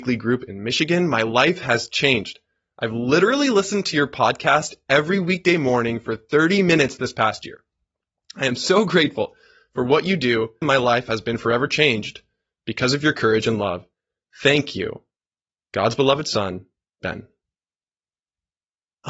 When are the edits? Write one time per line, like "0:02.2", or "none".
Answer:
0:10.6

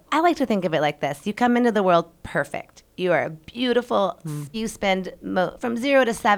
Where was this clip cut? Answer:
0:04.5

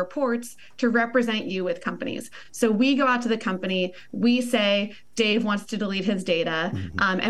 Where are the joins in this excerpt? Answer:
none

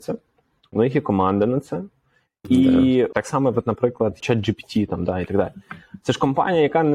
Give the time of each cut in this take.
0:03.1
0:04.2

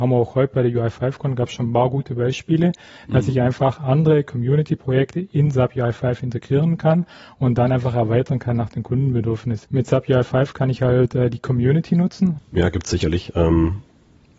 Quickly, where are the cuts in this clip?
0:09.6
0:12.4

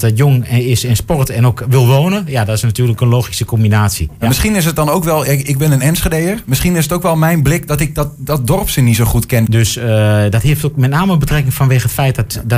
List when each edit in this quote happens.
0:09.5

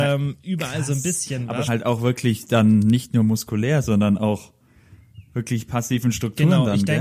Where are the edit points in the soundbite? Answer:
0:01.7

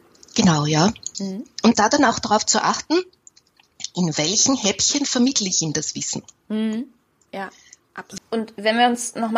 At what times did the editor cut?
0:01.1
0:08.2

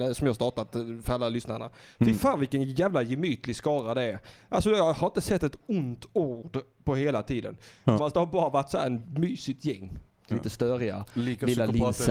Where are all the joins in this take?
0:08.0
0:10.3

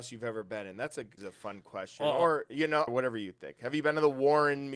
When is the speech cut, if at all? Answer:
0:01.2
0:02.9

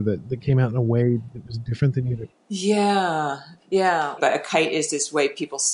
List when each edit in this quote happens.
0:04.2

